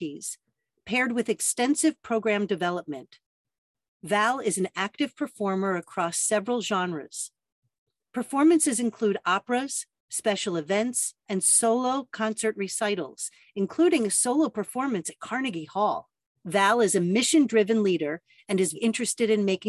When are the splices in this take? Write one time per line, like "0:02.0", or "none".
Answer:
0:16.4
0:18.7